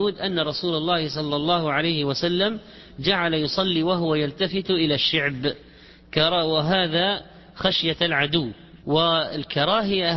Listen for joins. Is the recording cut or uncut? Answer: cut